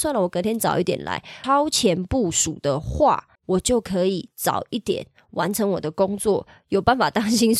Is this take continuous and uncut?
no; 2 cuts; at 1.4 s, 3.4 s

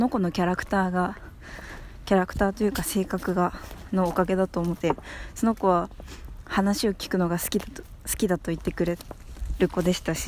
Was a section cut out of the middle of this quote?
yes; 1 cut; at 4.8 s

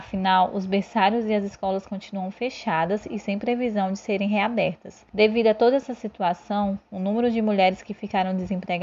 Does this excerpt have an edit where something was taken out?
yes; 1 cut; at 5.1 s

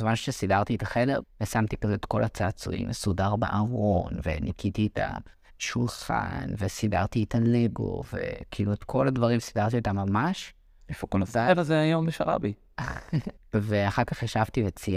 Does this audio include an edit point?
yes; 2 cuts; at 1.2 s, 13.4 s

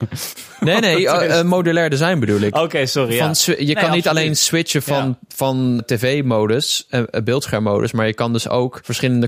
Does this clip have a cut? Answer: yes; 1 cut; at 5.8 s

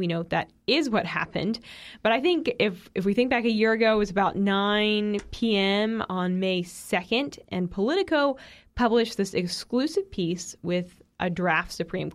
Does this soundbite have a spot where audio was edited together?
no; 0 cuts

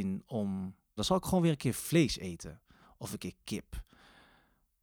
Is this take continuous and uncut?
no; 1 cut; at 1.0 s

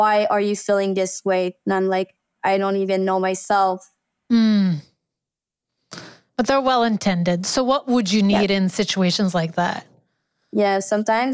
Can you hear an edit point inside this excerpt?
no; 0 cuts

